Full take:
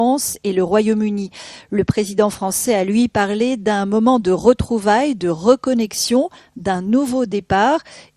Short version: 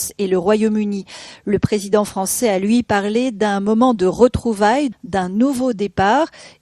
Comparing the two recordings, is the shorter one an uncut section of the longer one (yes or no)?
no